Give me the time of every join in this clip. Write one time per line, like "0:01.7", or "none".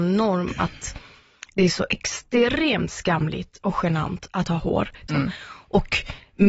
0:05.1